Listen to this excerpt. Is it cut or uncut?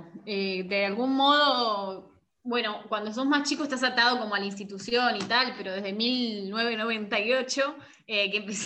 uncut